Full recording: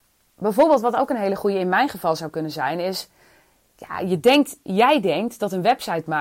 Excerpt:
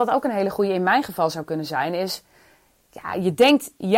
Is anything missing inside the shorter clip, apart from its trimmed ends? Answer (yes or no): no